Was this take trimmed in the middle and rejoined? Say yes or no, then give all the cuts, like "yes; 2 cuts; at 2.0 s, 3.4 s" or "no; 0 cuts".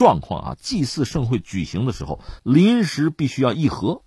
yes; 1 cut; at 2.4 s